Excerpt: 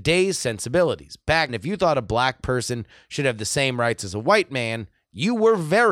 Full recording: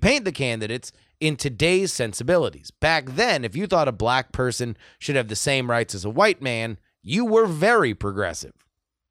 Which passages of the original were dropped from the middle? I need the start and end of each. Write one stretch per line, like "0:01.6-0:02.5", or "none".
0:03.0-0:03.4